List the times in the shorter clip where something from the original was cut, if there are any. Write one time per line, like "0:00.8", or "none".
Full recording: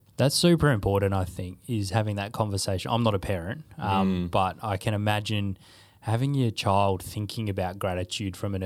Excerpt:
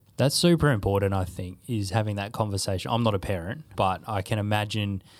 0:03.7

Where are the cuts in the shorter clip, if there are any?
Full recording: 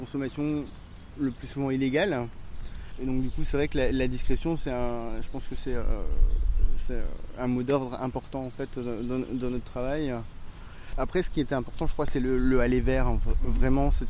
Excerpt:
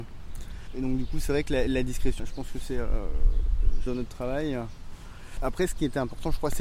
0:02.2
0:03.9

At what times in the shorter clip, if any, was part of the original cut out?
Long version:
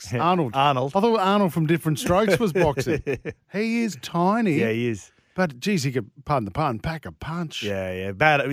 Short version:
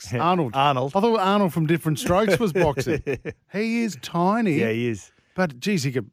none

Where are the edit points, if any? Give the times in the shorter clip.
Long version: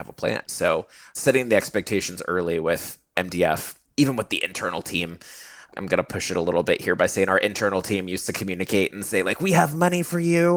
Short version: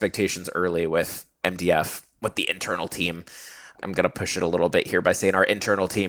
0:02.2

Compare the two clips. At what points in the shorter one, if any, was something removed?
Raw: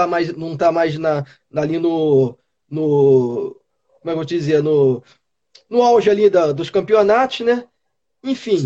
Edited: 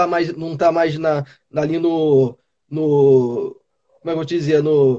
none

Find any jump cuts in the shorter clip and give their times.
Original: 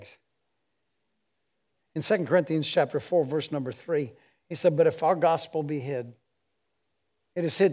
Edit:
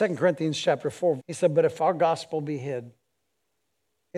0:01.2

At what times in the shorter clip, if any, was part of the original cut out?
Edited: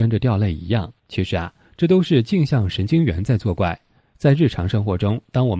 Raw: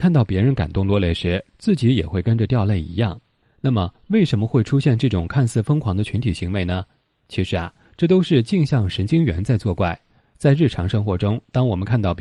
0:01.0

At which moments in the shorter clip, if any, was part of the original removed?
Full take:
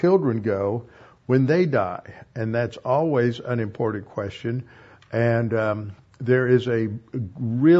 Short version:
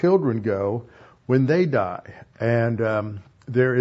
0:02.3

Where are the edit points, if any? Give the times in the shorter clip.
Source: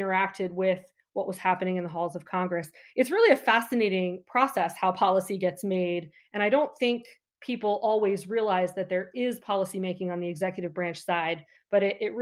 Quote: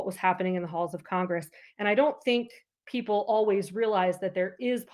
0:01.7

